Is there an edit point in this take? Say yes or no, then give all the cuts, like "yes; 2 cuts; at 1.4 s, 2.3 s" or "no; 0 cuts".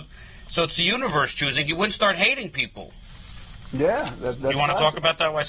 no; 0 cuts